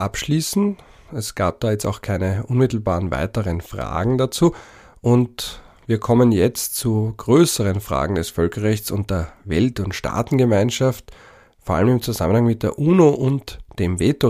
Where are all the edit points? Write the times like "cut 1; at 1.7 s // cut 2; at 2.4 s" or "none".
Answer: none